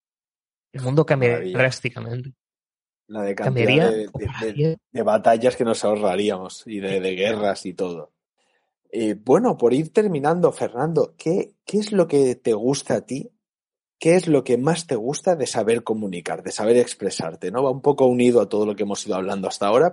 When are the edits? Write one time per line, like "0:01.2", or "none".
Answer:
none